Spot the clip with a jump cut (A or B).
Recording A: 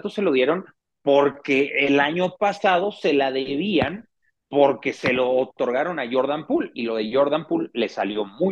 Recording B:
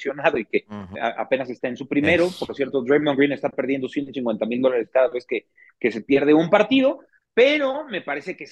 B